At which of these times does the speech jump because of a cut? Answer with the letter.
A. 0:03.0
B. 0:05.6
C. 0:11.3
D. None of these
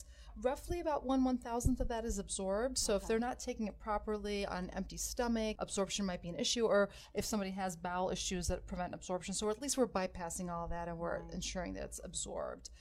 B